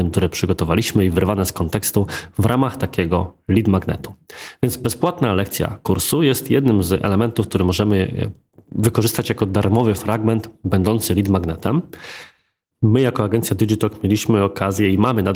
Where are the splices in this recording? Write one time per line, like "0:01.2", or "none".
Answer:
0:12.7